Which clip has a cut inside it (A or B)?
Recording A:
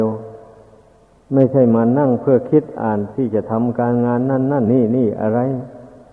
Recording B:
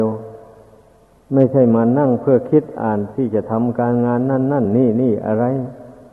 A